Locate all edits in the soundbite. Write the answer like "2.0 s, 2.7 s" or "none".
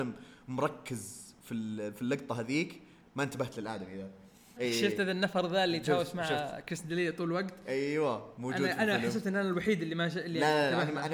4.6 s